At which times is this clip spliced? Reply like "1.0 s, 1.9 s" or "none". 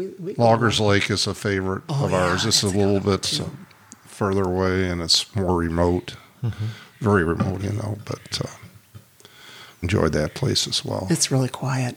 7.6 s, 9.8 s